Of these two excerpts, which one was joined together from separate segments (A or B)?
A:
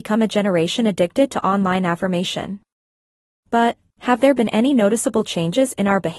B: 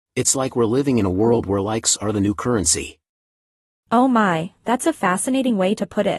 A